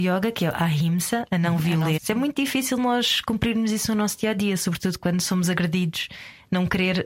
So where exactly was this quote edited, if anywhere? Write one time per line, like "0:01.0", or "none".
0:02.0

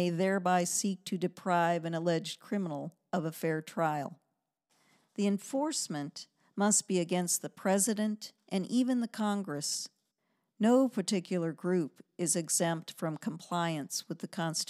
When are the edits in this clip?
none

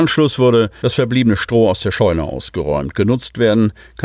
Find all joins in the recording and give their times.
none

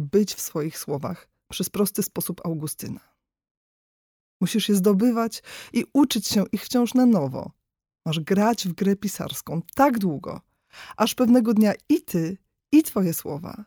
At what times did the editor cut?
0:04.2

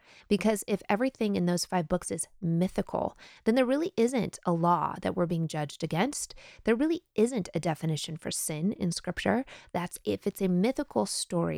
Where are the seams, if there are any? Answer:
0:09.7

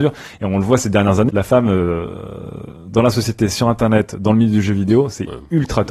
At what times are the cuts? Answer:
0:01.3

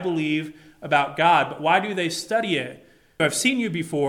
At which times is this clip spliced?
0:03.2

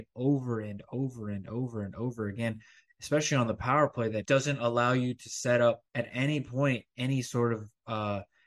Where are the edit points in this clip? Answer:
0:04.2
0:05.9

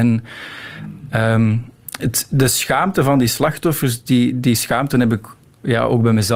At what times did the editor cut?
none

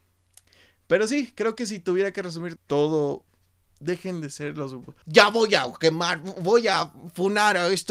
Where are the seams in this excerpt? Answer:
0:02.6
0:05.0

